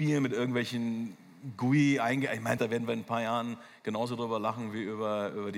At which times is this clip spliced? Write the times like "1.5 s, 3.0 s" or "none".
2.6 s